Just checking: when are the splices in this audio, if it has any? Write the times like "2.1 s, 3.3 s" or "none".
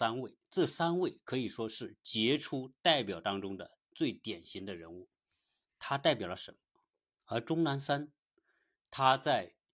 7.2 s